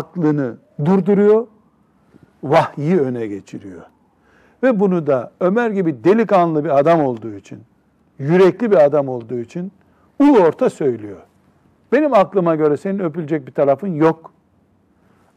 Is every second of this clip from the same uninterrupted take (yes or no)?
yes